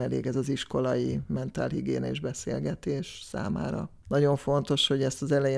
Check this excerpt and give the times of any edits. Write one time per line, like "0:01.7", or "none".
0:04.0